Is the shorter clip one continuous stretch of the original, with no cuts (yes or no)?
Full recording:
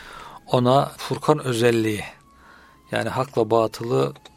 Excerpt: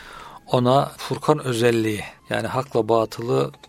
no